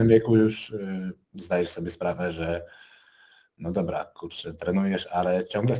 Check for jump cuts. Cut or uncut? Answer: cut